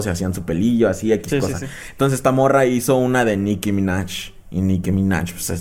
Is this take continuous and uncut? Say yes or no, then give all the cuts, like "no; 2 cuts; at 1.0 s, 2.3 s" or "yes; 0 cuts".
yes; 0 cuts